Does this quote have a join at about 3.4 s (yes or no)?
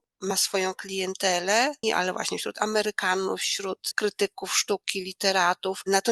no